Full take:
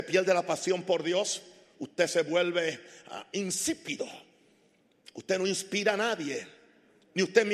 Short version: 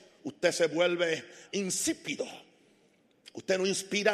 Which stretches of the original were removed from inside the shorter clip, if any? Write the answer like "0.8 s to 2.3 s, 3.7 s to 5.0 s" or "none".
3.0 s to 3.3 s